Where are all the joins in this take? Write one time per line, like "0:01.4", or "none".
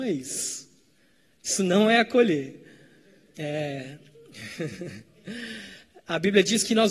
0:03.3